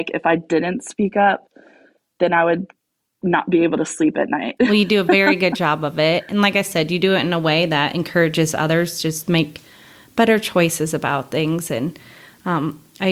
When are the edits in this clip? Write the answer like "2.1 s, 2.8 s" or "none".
none

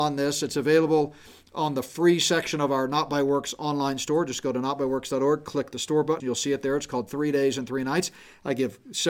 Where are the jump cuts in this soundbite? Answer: 6.2 s

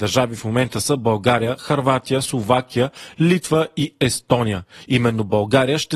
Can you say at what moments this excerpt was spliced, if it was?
none

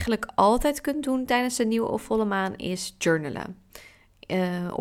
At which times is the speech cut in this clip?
none

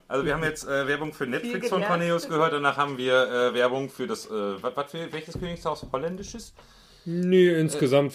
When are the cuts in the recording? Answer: none

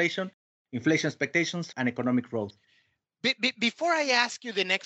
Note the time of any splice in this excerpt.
1.7 s

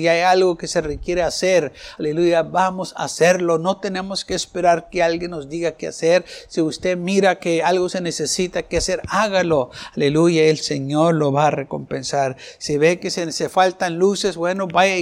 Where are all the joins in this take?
none

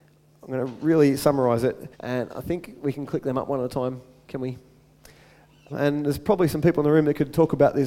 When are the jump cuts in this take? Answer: 1.9 s, 5.7 s

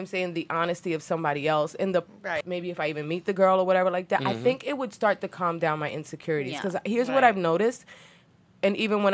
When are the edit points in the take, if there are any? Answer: 2.4 s

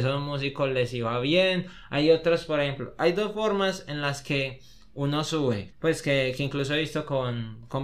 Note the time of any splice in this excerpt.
5.7 s

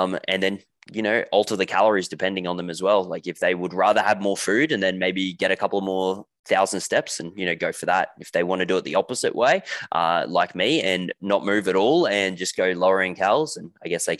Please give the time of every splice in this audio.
none

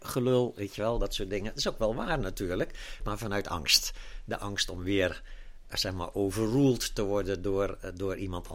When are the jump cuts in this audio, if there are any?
3.0 s

